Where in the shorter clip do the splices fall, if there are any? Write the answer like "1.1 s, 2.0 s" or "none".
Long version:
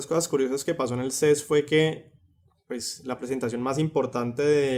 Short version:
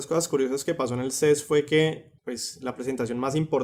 2.2 s